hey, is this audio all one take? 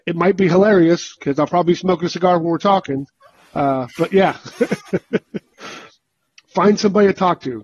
yes; 0 cuts

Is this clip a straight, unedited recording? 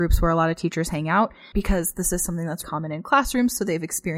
no; 2 cuts; at 1.5 s, 2.6 s

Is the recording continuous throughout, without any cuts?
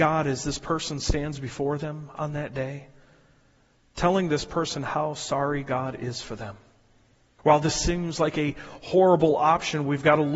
no; 1 cut; at 7.4 s

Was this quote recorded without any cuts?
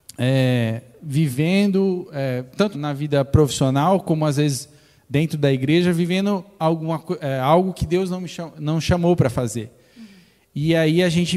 no; 1 cut; at 2.7 s

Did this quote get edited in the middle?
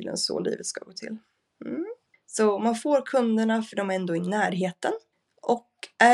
yes; 1 cut; at 2.1 s

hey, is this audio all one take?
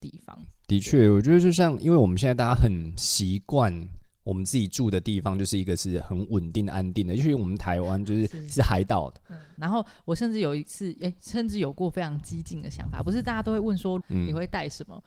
no; 2 cuts; at 9.6 s, 14.0 s

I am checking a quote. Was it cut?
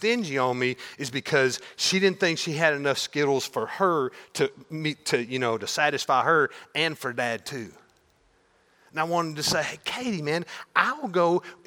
no; 0 cuts

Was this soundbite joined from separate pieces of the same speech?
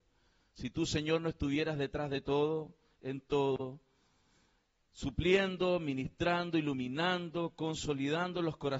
no; 0 cuts

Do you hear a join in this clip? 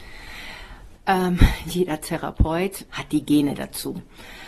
yes; 2 cuts; at 1.0 s, 2.9 s

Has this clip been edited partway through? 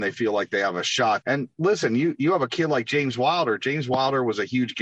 yes; 1 cut; at 1.2 s

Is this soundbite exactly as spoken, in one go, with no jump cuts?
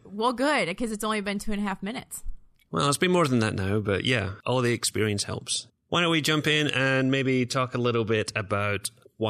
no; 1 cut; at 5.7 s

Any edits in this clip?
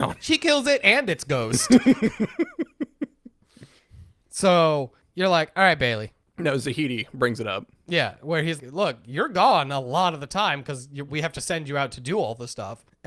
yes; 2 cuts; at 8.6 s, 11.1 s

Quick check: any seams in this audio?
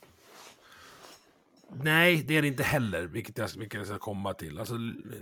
no; 0 cuts

